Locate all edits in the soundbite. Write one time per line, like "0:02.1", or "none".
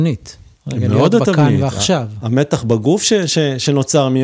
none